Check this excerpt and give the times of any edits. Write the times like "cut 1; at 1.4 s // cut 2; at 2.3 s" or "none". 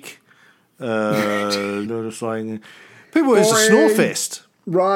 cut 1; at 1.8 s // cut 2; at 3.5 s